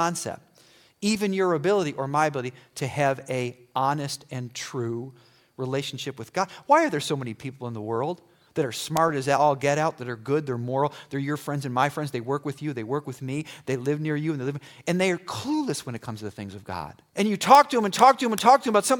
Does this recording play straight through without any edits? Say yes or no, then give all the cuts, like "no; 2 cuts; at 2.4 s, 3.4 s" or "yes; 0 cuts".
no; 1 cut; at 17.1 s